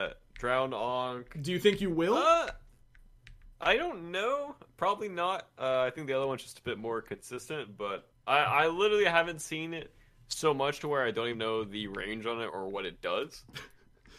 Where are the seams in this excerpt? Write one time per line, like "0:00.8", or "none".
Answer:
0:11.3